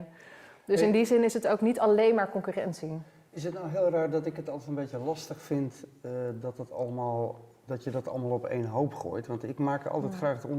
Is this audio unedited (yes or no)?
yes